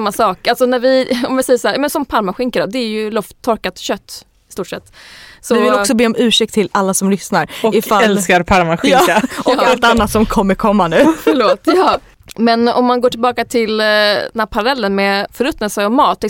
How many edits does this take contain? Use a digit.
2